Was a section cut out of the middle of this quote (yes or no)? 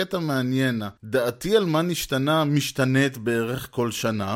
yes